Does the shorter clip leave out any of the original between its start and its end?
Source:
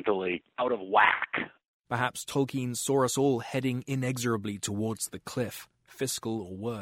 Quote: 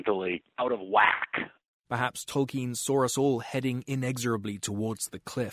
no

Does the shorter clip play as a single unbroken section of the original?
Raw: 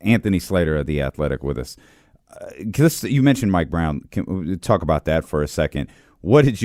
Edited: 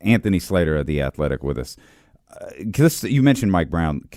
yes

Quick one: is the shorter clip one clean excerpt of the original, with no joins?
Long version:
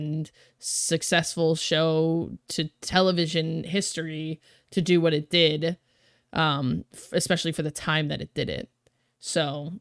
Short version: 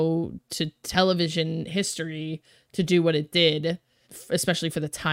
no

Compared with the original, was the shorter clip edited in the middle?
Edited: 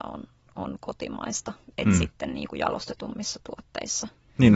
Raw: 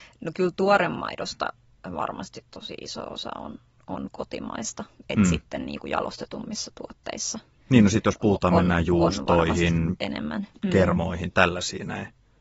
no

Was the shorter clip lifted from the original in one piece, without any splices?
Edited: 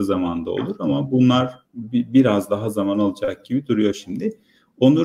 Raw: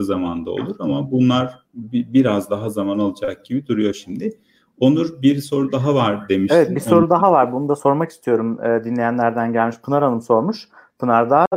yes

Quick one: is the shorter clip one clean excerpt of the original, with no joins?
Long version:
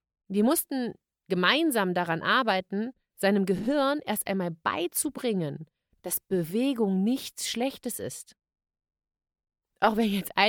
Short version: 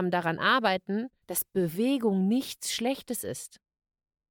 no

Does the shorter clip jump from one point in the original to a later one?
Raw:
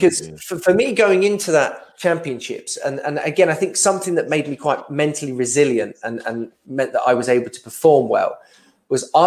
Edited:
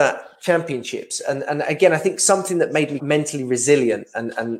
yes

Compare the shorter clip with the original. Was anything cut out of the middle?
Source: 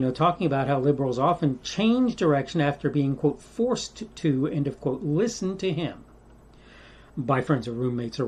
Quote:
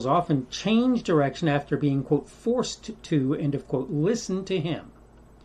no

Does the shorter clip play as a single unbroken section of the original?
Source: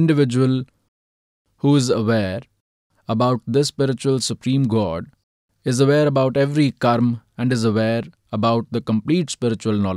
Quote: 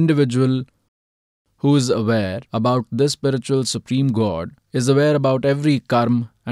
no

